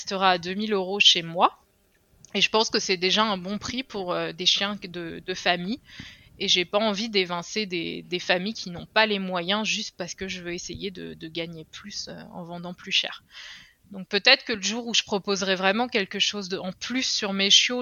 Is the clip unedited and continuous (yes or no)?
yes